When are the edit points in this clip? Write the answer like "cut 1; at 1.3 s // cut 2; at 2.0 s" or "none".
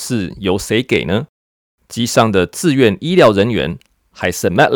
none

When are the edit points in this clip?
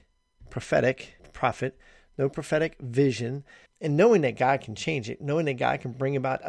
cut 1; at 1.2 s // cut 2; at 3.7 s

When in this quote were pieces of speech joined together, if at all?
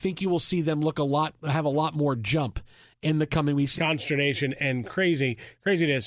cut 1; at 3.8 s

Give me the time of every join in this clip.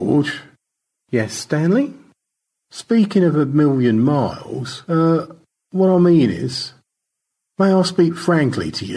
none

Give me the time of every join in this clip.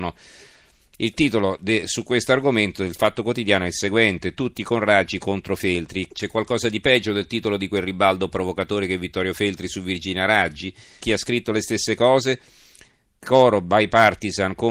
cut 1; at 6.1 s // cut 2; at 11.0 s

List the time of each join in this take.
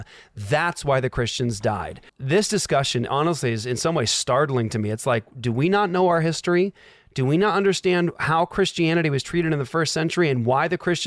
cut 1; at 2.1 s

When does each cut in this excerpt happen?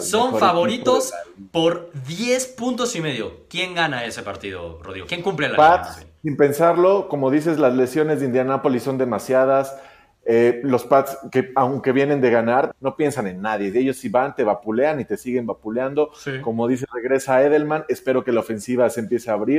cut 1; at 12.7 s

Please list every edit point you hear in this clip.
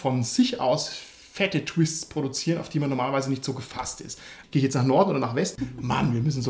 cut 1; at 4.4 s // cut 2; at 5.6 s

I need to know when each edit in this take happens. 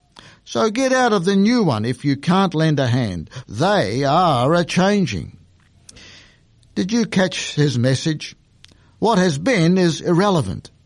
cut 1; at 3.4 s

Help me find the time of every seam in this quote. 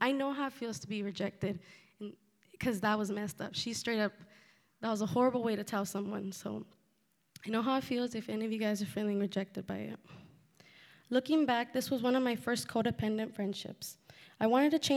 none

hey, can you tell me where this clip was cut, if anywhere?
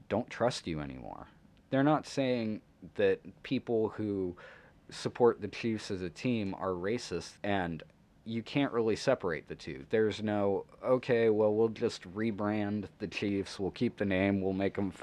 cut 1; at 7.4 s

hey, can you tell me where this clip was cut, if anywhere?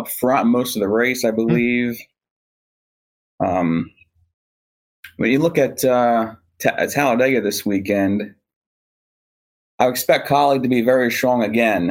none

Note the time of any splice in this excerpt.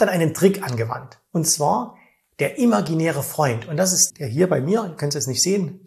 cut 1; at 4.1 s

